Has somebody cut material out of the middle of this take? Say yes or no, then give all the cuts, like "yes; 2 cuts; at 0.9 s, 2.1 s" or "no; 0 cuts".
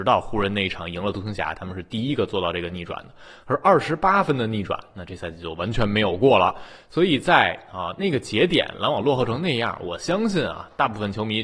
no; 0 cuts